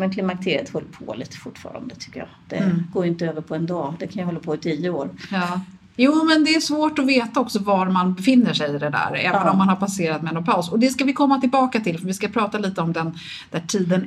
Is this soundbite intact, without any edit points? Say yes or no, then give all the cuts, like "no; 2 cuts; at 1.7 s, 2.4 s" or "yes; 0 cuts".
yes; 0 cuts